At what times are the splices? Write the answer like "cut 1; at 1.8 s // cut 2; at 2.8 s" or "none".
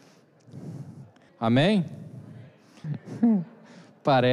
cut 1; at 1.3 s // cut 2; at 2.8 s